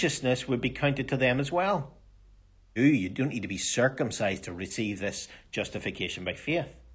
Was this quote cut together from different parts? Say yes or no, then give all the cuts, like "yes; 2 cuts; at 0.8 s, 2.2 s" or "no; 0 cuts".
yes; 1 cut; at 2.8 s